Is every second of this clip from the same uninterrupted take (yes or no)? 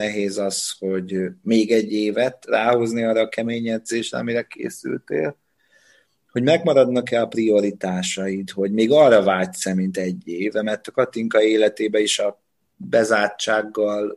yes